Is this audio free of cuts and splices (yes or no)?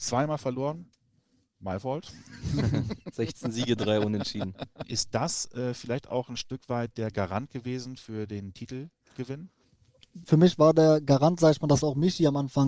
no